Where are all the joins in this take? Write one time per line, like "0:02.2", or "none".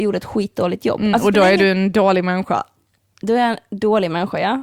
none